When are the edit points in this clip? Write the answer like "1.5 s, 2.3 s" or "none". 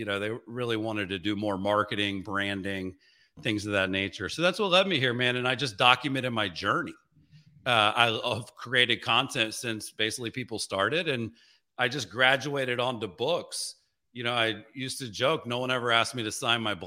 none